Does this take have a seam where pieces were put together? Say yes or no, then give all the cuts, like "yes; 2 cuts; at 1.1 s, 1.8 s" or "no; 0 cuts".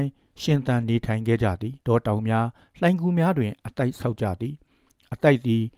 yes; 1 cut; at 1.8 s